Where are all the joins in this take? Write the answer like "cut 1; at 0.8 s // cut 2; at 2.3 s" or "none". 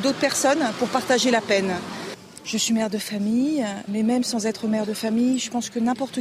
cut 1; at 3.9 s